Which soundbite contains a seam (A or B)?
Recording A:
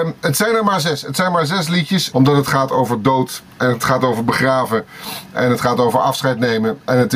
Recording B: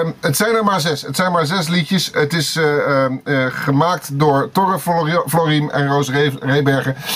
A